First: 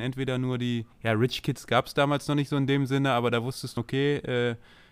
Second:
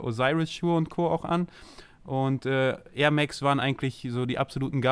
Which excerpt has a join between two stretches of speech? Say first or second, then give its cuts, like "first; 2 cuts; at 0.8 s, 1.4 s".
first; 2 cuts; at 0.9 s, 3.8 s